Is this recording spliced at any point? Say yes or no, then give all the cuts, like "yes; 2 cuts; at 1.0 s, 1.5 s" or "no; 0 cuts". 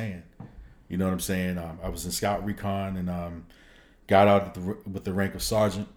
no; 0 cuts